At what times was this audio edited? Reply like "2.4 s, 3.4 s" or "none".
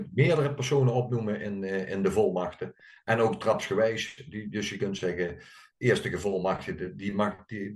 none